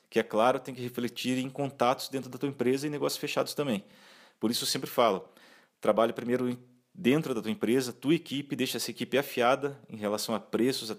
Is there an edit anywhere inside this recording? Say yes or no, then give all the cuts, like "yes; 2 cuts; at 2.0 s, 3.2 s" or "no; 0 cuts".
no; 0 cuts